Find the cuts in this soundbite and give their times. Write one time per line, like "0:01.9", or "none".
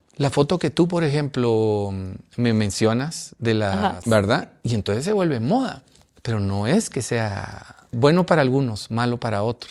0:04.0
0:07.9